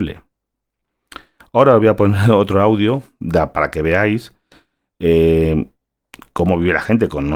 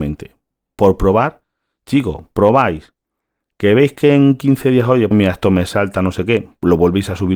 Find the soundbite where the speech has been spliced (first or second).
second